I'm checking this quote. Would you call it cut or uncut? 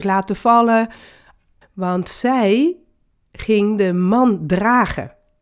cut